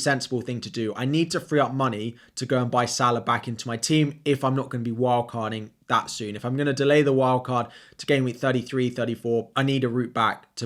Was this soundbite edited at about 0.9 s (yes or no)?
no